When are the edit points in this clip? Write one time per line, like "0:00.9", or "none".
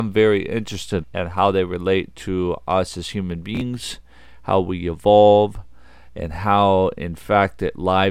0:01.0
0:06.1

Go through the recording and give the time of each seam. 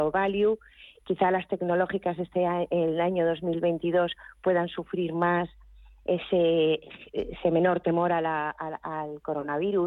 0:01.0

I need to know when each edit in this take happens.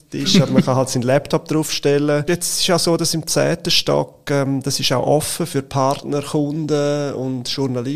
0:02.3

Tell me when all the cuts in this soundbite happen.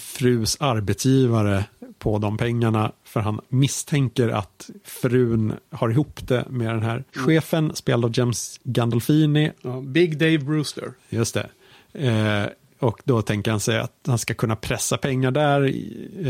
0:07.1

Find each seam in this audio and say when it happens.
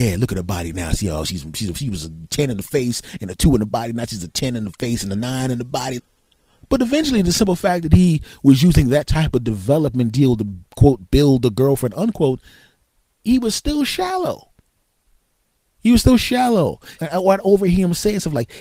0:06.0
0:17.0

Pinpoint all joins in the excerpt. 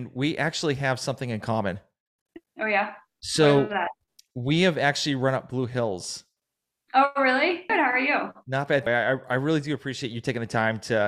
0:07.7
0:08.9

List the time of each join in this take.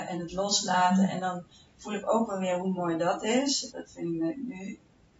0:03.7

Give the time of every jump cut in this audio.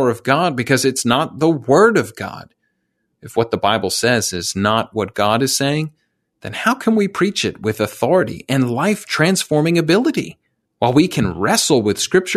0:10.7

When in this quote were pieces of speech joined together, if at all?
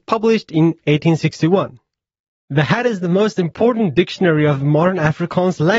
0:02.4

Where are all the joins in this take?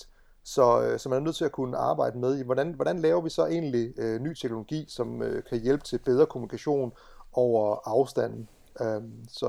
none

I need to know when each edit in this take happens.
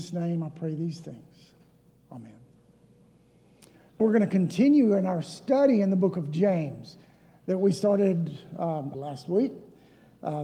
0:04.0
0:08.9

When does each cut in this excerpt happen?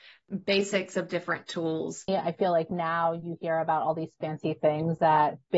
0:02.1

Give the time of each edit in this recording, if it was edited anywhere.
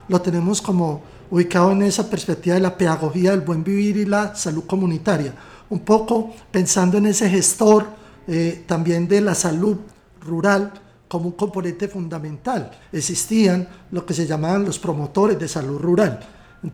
0:12.8

